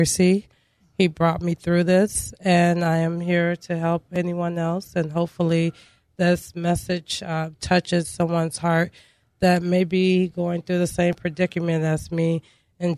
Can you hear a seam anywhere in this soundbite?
no; 0 cuts

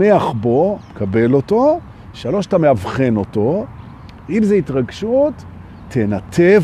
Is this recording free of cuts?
yes; 0 cuts

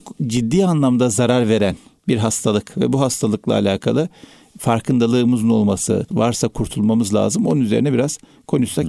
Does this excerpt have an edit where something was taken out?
yes; 1 cut; at 6.1 s

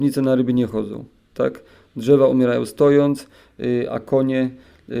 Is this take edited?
no; 0 cuts

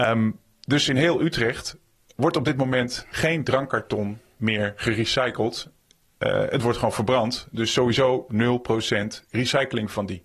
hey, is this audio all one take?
yes; 0 cuts

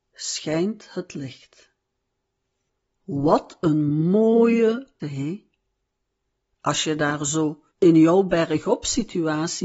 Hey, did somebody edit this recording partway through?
yes; 2 cuts; at 5.0 s, 7.7 s

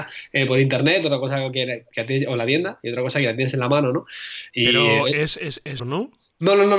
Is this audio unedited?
no; 2 cuts; at 4.5 s, 5.8 s

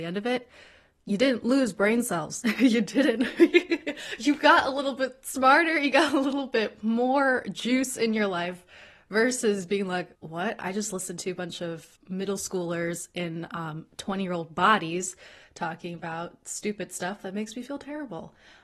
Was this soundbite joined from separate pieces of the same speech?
yes; 2 cuts; at 10.1 s, 12.0 s

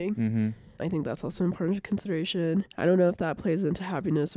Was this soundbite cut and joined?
yes; 1 cut; at 2.7 s

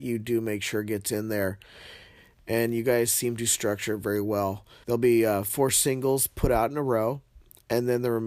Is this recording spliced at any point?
yes; 1 cut; at 4.8 s

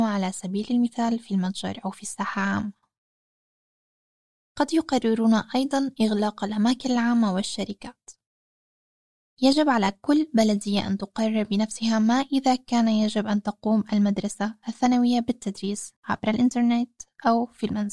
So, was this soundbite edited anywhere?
yes; 2 cuts; at 9.2 s, 16.0 s

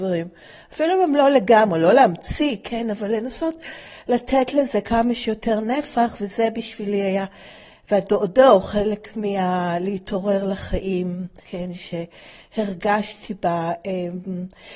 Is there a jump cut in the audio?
yes; 1 cut; at 11.4 s

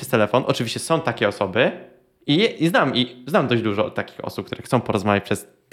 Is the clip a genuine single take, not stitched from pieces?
yes; 0 cuts

